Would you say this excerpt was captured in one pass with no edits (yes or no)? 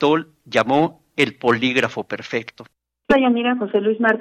no